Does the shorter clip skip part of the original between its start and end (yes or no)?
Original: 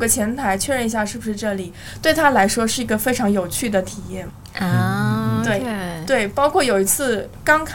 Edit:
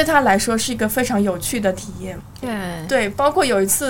yes